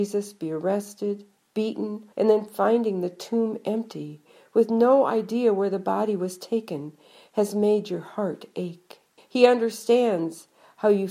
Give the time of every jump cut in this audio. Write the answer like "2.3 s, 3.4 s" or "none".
2.1 s, 9.2 s